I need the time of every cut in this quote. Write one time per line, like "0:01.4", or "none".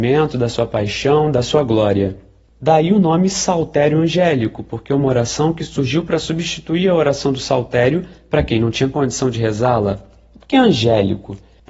none